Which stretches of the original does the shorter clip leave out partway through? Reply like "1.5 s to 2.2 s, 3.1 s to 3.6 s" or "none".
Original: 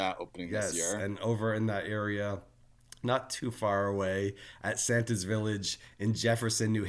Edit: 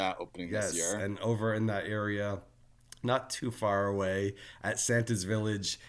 none